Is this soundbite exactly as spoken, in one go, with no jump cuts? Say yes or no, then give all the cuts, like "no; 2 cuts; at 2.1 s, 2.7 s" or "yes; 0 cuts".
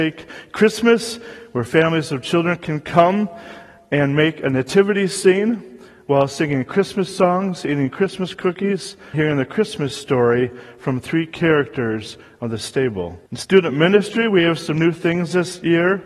no; 2 cuts; at 9.1 s, 13.3 s